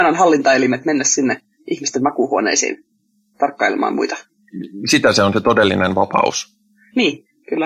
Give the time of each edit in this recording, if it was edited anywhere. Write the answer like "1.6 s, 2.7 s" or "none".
none